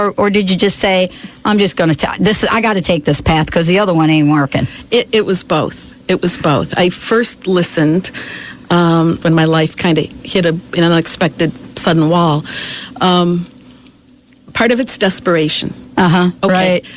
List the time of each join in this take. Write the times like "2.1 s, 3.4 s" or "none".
9.2 s